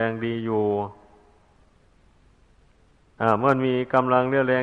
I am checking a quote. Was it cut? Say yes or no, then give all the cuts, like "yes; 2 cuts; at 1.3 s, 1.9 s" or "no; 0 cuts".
no; 0 cuts